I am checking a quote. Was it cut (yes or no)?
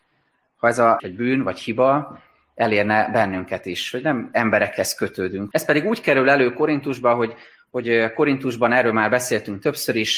yes